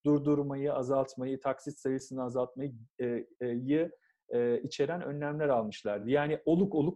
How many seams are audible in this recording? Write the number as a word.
zero